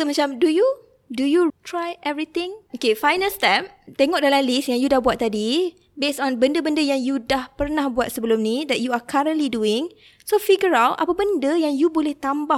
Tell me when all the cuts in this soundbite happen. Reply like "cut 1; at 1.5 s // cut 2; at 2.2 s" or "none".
cut 1; at 1.5 s // cut 2; at 2.7 s